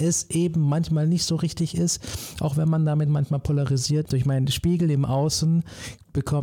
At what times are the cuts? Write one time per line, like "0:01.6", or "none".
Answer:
0:04.0